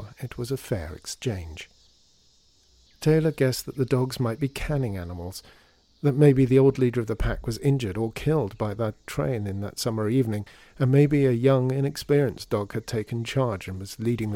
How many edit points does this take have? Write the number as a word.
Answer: one